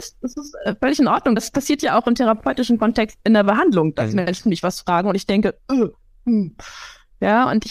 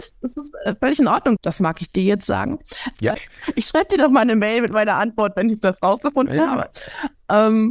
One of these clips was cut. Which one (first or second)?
second